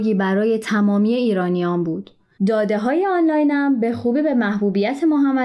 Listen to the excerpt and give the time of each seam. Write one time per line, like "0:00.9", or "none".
0:02.3